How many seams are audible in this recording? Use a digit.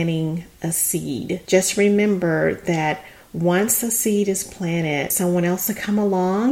1